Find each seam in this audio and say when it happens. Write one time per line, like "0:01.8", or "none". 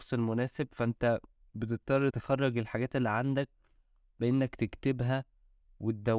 0:02.1